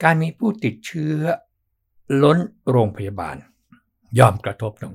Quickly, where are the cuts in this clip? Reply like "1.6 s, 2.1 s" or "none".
none